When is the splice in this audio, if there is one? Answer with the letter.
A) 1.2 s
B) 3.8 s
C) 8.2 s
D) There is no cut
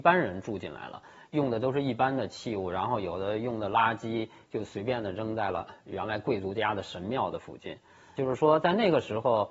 C